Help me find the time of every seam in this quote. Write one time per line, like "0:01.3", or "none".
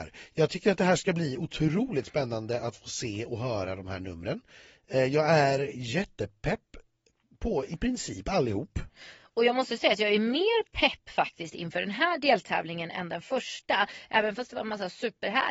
none